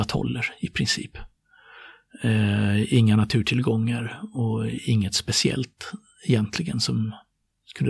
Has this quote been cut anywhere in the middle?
no; 0 cuts

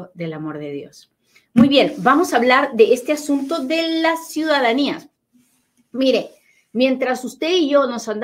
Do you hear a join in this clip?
no; 0 cuts

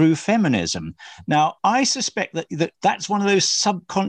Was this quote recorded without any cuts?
no; 2 cuts; at 1.6 s, 2.7 s

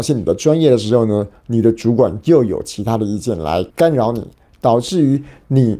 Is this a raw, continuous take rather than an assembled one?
no; 1 cut; at 3.7 s

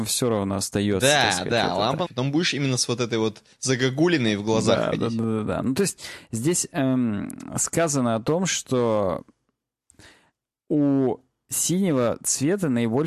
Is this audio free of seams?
no; 2 cuts; at 2.1 s, 5.6 s

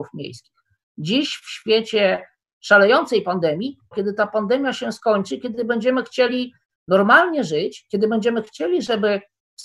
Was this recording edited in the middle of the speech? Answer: yes; 2 cuts; at 0.9 s, 3.9 s

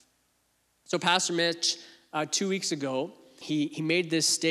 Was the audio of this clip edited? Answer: yes; 1 cut; at 3.4 s

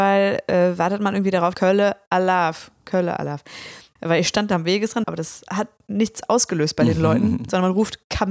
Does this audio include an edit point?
yes; 3 cuts; at 1.5 s, 4.0 s, 5.0 s

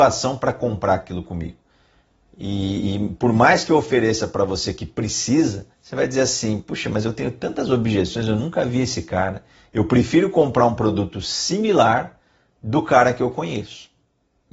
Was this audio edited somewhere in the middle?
yes; 1 cut; at 5.7 s

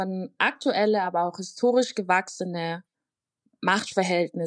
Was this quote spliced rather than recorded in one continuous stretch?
no; 0 cuts

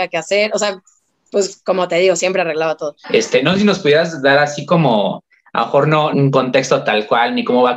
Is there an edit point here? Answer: yes; 2 cuts; at 3.0 s, 6.1 s

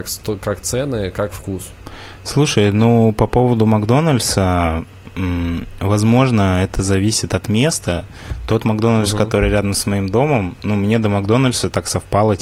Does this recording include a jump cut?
no; 0 cuts

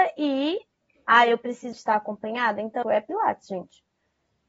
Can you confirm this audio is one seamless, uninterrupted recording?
no; 2 cuts; at 1.7 s, 2.8 s

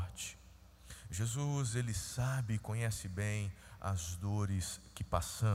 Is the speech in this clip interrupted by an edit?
no; 0 cuts

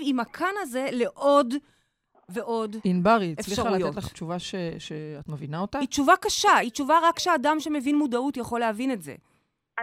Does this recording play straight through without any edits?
yes; 0 cuts

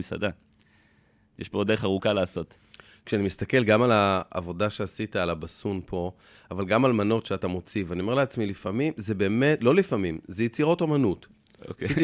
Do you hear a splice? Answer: no; 0 cuts

